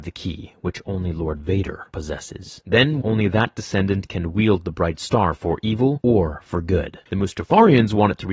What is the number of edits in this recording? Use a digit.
2